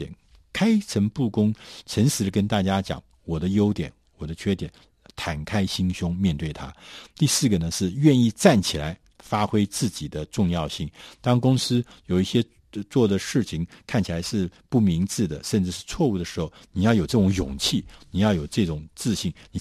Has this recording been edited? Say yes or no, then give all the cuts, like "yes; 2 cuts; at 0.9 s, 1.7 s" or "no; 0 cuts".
no; 0 cuts